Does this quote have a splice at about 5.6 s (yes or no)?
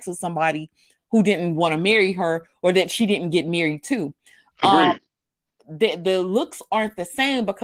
yes